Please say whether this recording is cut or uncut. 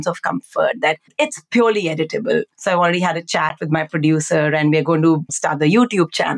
cut